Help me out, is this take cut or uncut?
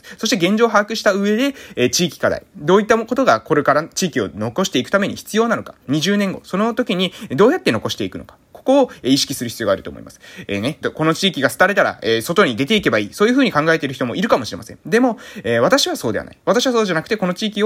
cut